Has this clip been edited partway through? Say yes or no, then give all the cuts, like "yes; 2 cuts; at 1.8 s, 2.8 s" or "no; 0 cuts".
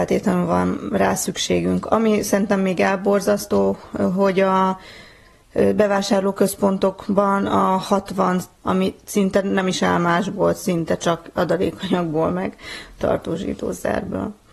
yes; 1 cut; at 8.6 s